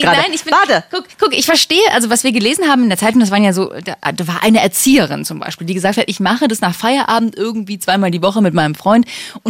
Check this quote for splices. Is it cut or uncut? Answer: uncut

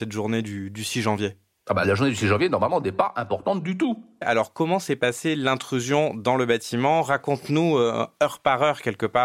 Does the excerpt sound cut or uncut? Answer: cut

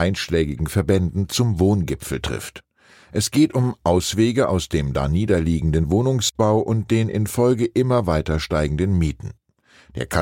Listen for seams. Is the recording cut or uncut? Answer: uncut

